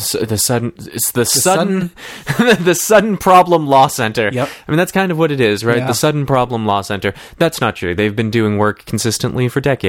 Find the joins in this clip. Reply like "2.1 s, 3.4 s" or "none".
none